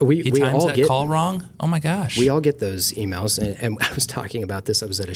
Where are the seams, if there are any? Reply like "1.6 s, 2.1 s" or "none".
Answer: none